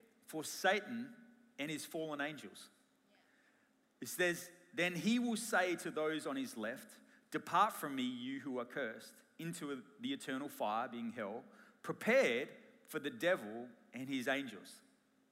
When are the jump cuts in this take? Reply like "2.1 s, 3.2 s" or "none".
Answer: 3.8 s